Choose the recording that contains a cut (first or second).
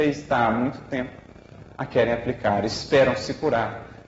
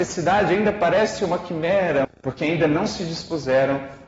second